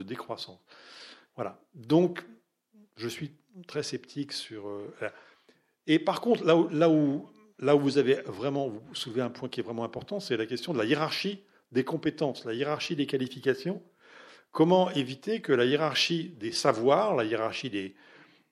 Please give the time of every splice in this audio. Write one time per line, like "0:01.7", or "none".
0:01.3

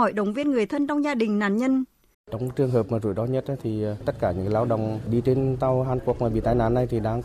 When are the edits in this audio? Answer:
0:02.1

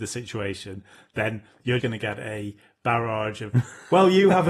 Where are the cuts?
0:01.8

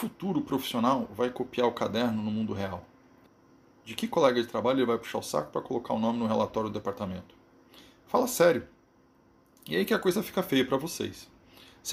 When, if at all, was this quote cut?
none

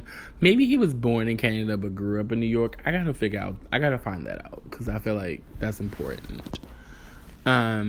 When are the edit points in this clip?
none

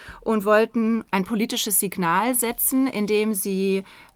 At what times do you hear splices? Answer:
none

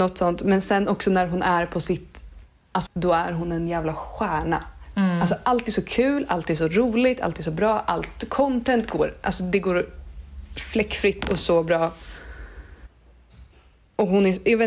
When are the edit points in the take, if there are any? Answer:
0:02.9

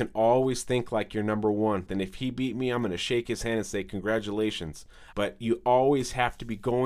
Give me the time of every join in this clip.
0:01.9
0:05.1

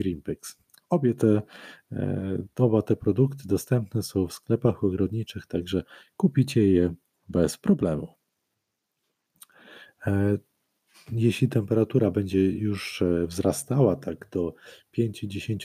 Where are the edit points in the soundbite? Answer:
none

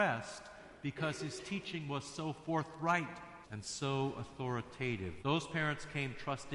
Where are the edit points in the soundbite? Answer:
0:03.4
0:05.2

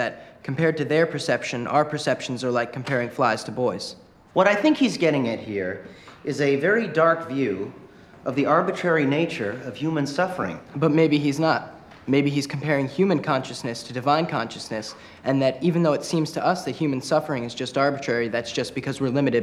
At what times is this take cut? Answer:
0:04.3

